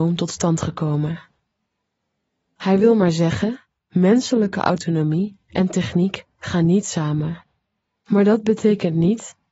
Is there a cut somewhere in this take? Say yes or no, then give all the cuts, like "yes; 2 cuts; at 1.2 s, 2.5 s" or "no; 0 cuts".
no; 0 cuts